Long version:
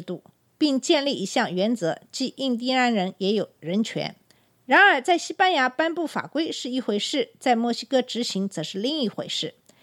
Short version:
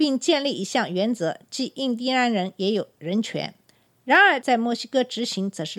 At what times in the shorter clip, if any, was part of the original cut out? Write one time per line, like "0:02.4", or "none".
0:04.4